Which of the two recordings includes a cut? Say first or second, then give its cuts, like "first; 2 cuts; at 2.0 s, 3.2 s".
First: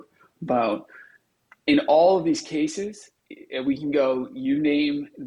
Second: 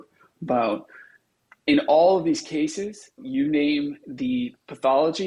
second; 1 cut; at 3.2 s